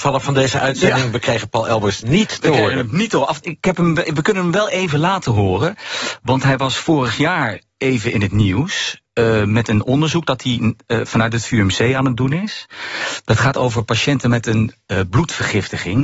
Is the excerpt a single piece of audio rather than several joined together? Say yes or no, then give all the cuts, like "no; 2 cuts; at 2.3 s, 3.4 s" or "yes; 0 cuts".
no; 1 cut; at 3.4 s